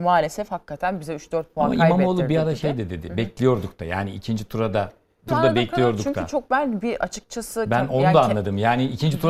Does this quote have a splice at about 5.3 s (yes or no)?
yes